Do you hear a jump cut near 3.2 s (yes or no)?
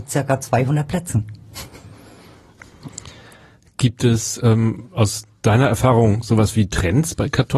no